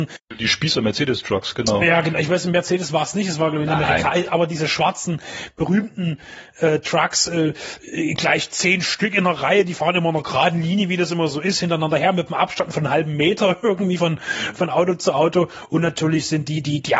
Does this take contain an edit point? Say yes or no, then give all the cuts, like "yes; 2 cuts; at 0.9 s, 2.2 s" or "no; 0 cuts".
no; 0 cuts